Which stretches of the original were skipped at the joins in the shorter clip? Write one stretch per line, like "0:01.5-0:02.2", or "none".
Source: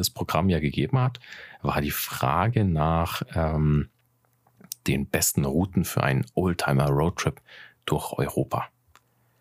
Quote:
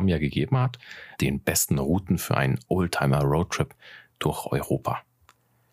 0:01.6-0:04.8